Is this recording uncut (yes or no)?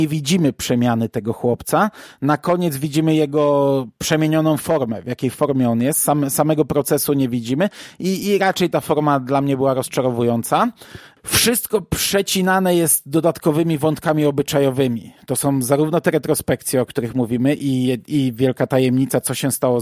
yes